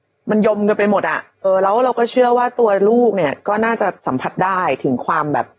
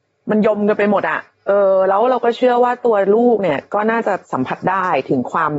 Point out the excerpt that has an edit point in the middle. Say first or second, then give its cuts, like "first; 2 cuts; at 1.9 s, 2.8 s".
first; 1 cut; at 1.4 s